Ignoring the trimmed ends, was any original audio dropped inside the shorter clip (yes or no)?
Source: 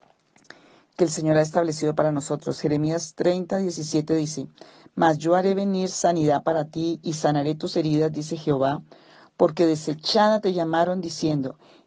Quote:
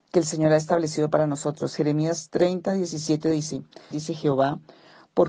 yes